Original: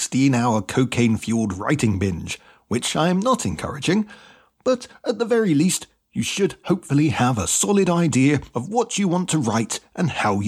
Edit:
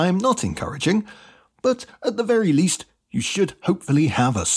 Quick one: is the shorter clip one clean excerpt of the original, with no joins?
yes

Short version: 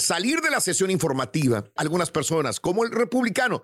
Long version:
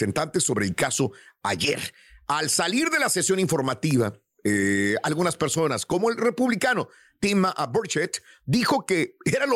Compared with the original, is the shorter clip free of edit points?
no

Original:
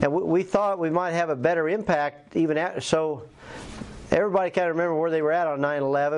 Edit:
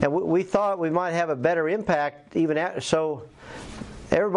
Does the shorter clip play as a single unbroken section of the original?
yes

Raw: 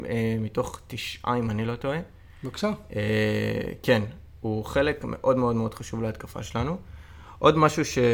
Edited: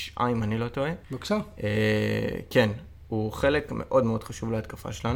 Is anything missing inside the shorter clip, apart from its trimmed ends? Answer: yes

